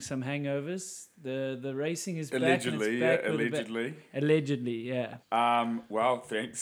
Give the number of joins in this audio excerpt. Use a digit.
1